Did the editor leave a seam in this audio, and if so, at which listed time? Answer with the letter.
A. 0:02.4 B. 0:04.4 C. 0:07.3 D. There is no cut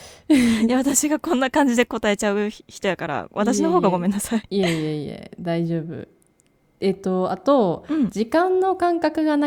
B